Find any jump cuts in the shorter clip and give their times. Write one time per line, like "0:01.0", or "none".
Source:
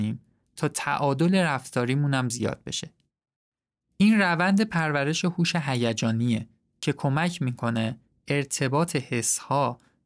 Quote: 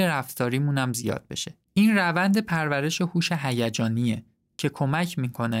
0:01.6